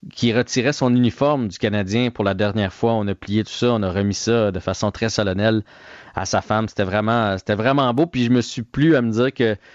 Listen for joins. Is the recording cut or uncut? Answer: uncut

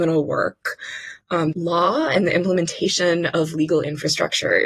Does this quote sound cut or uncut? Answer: cut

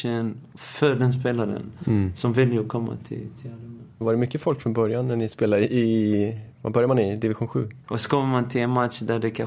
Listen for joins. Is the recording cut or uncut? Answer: cut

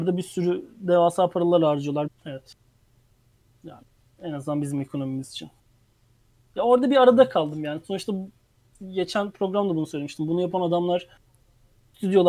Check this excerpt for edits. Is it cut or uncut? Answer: cut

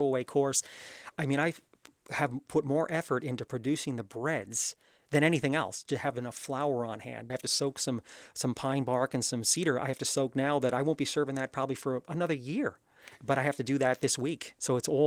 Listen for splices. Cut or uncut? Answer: cut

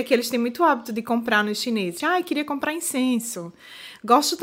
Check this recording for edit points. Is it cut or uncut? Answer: cut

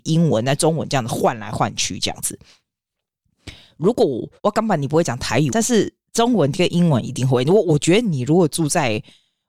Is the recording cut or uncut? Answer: cut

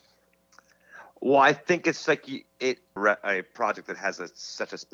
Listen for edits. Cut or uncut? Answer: cut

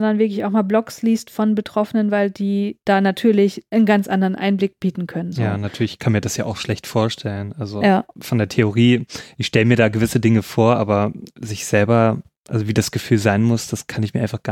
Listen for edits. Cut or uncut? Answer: uncut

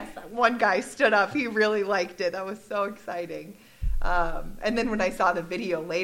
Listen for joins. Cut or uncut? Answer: uncut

